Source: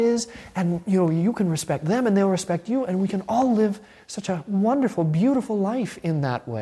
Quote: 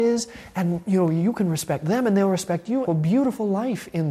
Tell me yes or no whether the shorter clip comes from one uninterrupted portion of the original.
no